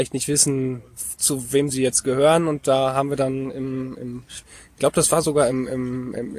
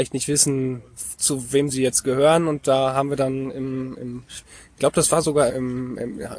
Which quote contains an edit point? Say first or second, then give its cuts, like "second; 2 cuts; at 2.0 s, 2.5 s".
second; 1 cut; at 5.5 s